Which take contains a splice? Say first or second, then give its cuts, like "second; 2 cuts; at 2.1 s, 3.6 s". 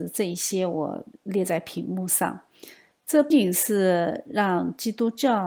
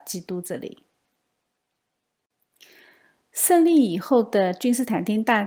first; 1 cut; at 3.3 s